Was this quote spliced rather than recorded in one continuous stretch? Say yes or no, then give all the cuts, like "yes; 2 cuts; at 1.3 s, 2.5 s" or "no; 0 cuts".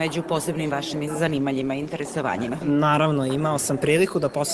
yes; 1 cut; at 2.6 s